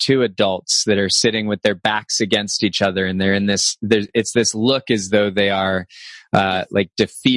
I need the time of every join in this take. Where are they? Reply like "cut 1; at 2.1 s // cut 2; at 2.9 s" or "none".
none